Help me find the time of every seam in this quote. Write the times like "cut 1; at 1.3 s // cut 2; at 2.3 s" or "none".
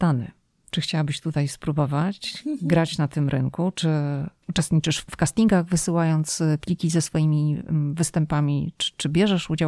none